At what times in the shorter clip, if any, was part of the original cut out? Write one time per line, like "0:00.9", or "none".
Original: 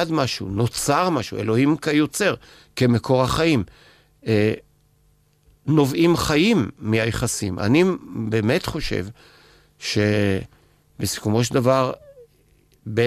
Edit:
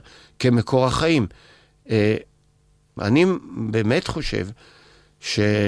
0:03.0